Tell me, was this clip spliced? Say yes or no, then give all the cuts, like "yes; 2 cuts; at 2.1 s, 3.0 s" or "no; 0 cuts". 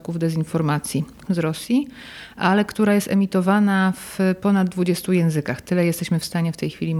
yes; 1 cut; at 1.3 s